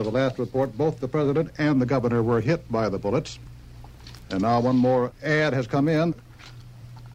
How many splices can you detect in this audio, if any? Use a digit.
0